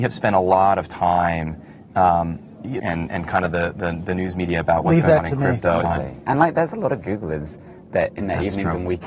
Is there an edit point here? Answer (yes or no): yes